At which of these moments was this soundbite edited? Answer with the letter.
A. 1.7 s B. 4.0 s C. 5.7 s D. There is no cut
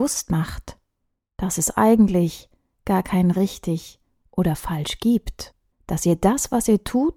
C